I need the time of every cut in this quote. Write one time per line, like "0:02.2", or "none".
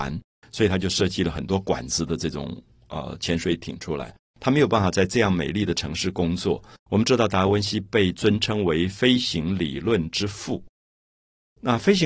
0:04.3
0:06.8